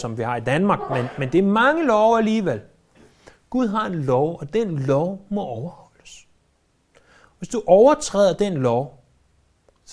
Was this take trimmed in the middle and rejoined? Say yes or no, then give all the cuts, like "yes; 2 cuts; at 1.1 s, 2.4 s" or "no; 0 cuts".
no; 0 cuts